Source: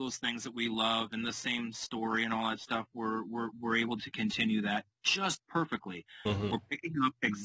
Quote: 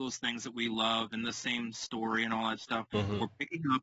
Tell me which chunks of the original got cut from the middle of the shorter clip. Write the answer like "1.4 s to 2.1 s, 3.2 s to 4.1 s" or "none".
2.9 s to 6.2 s